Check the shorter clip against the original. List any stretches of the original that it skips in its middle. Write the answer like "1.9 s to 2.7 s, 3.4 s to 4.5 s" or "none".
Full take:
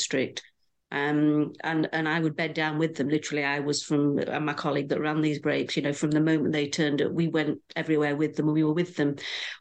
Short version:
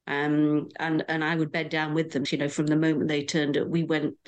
3.1 s to 5.7 s